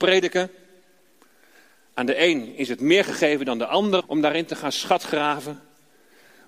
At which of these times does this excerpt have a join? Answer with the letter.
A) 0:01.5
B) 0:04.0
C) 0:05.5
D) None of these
B